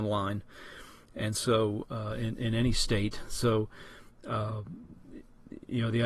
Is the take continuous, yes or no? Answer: yes